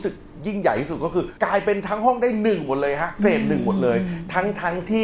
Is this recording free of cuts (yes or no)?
no